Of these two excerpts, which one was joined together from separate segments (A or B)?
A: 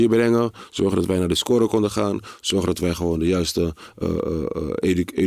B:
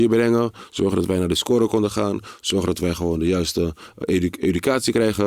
B